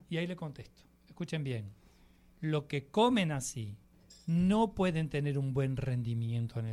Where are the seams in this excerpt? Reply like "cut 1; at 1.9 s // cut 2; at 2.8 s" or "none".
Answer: none

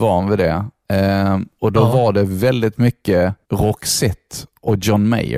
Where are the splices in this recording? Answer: cut 1; at 3.4 s

